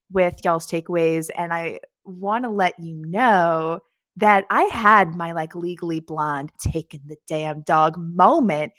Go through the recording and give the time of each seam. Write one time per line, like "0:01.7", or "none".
0:01.3
0:06.5